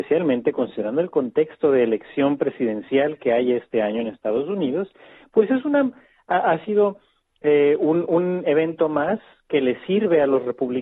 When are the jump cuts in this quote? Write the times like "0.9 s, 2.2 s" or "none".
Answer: none